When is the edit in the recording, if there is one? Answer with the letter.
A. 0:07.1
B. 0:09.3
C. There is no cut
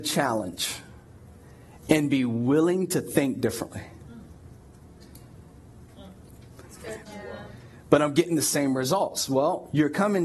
A